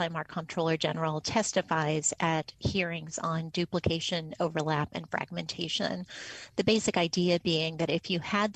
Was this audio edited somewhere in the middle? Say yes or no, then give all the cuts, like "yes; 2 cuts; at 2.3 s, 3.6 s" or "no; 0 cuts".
no; 0 cuts